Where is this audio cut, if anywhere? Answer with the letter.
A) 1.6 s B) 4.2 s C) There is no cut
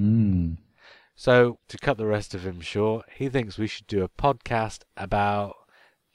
A